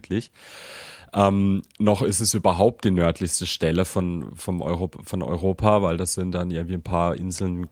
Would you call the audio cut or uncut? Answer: uncut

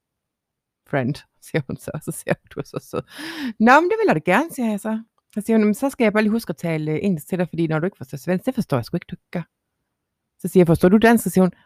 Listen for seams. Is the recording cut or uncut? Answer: uncut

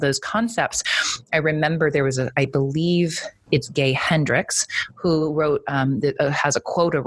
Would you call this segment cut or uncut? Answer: uncut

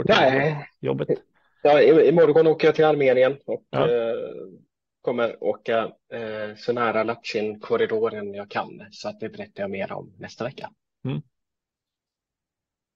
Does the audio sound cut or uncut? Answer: uncut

